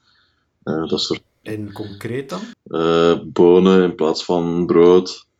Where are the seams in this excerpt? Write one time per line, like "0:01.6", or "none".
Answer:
0:01.4
0:02.5